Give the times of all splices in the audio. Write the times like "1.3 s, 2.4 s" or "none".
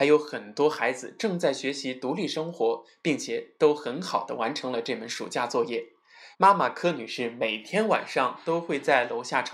6.3 s